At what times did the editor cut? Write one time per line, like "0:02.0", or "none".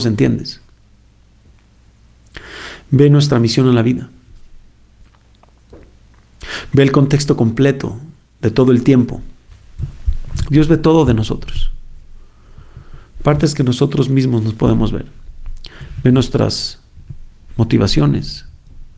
0:10.5